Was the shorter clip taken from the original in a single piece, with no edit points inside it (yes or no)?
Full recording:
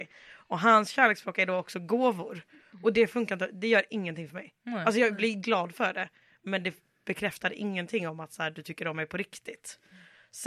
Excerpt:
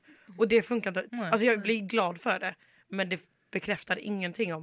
no